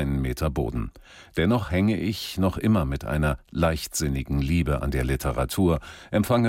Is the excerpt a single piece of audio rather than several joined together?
yes; 0 cuts

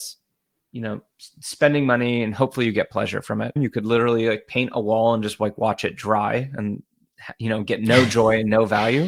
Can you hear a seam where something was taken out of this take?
yes; 1 cut; at 3.6 s

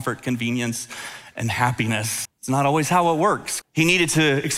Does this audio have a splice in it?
yes; 2 cuts; at 2.2 s, 3.6 s

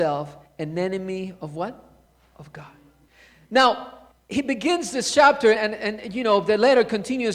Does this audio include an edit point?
yes; 1 cut; at 5.5 s

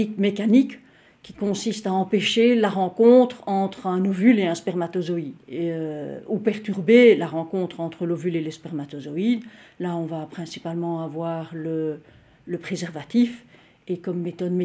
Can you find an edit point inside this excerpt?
yes; 1 cut; at 5.4 s

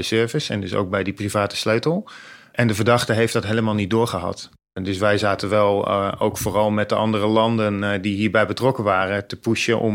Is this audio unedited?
yes; 0 cuts

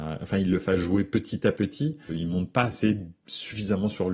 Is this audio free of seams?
no; 1 cut; at 2.1 s

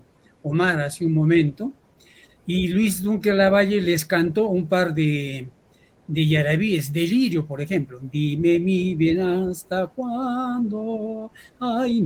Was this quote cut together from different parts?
no; 0 cuts

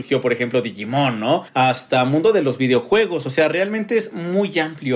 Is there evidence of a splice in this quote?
no; 0 cuts

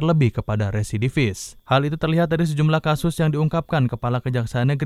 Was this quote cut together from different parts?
yes; 1 cut; at 1.6 s

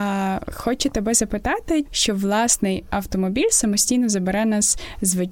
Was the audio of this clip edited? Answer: yes; 1 cut; at 1.9 s

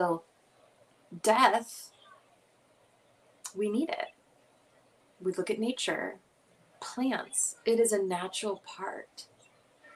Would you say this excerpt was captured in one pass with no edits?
yes; 0 cuts

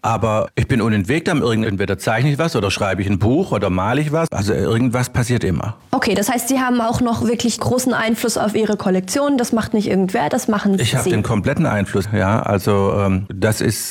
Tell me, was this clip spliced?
yes; 2 cuts; at 1.6 s, 12.0 s

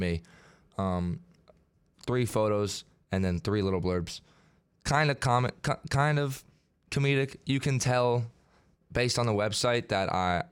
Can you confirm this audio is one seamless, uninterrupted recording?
yes; 0 cuts

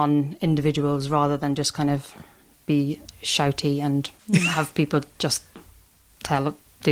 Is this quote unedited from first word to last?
yes; 0 cuts

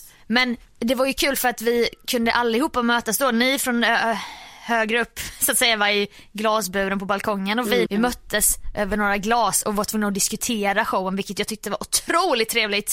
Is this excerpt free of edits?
no; 1 cut; at 7.9 s

